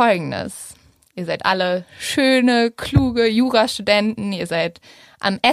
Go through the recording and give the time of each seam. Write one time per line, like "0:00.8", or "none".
none